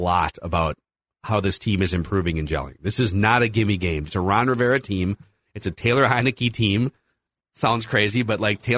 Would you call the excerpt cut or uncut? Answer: cut